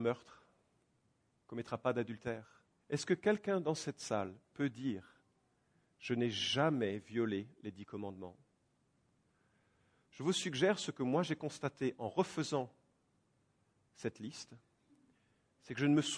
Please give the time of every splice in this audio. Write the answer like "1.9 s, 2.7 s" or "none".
2.8 s